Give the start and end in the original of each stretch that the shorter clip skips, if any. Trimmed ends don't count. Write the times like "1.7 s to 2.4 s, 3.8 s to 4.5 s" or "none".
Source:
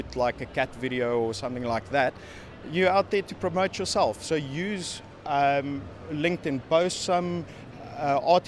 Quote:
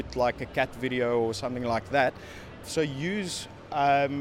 2.6 s to 4.2 s